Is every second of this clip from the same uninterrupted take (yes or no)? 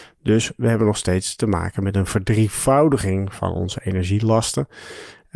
yes